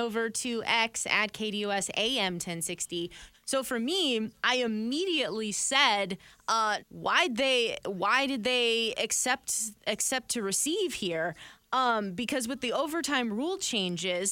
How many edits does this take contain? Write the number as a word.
two